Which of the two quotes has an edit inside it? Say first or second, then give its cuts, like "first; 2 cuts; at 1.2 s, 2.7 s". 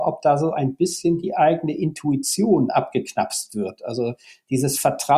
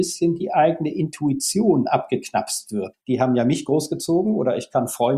second; 1 cut; at 2.9 s